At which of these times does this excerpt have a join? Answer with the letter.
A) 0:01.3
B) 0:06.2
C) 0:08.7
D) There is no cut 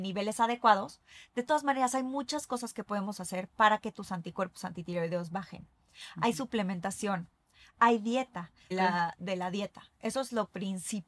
C